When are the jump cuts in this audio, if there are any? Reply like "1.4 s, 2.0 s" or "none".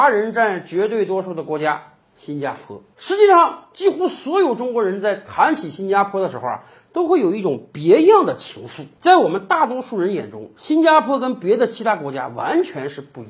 none